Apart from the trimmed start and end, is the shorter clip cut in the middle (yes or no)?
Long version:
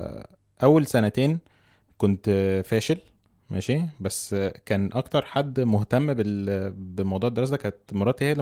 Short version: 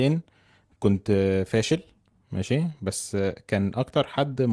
no